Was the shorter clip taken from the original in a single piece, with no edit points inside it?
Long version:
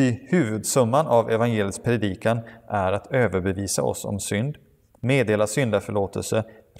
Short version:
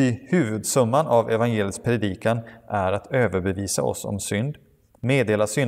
yes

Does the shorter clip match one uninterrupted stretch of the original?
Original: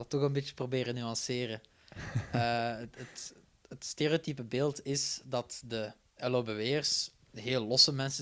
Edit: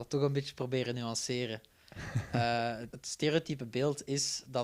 no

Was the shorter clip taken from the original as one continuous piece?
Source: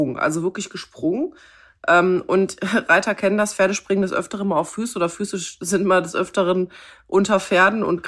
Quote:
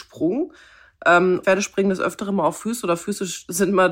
no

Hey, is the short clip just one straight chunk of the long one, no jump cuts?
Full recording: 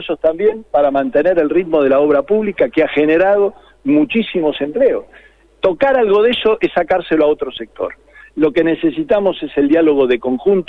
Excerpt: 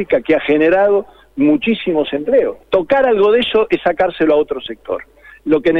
no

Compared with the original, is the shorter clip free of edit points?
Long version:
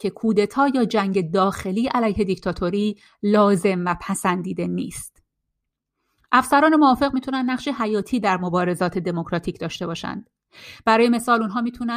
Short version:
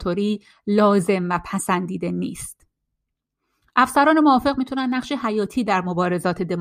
yes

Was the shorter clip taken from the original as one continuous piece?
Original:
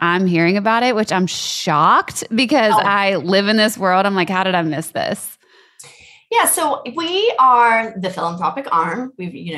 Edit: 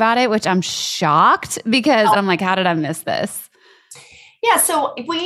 no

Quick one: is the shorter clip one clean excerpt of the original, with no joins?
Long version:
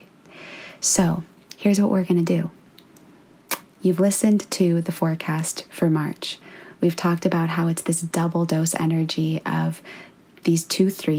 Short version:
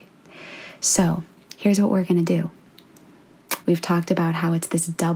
no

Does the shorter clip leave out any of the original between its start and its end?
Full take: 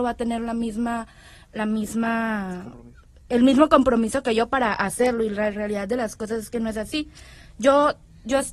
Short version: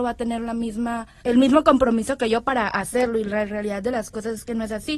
yes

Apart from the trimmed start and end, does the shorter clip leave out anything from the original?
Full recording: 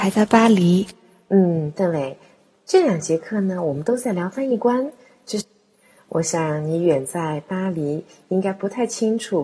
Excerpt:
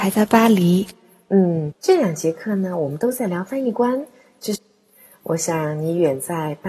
yes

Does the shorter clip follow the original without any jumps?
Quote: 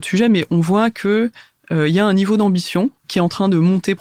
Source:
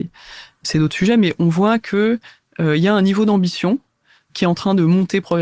no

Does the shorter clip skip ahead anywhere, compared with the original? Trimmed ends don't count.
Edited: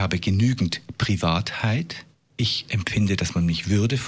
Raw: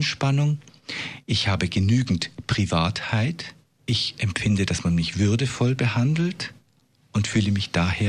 no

